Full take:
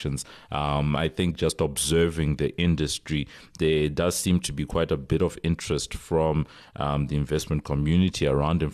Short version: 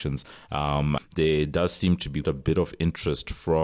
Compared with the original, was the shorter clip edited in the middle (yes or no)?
yes